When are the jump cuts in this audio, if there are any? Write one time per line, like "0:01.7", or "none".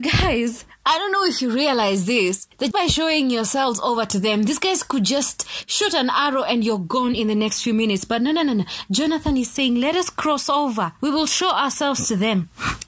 0:02.7